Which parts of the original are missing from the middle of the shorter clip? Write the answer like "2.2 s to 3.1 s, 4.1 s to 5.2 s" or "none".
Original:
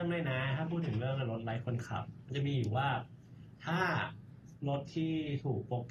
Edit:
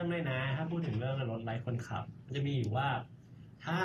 none